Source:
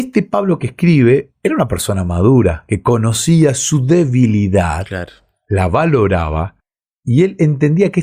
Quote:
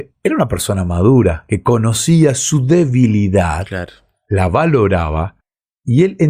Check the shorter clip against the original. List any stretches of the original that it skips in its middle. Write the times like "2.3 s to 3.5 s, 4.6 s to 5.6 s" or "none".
none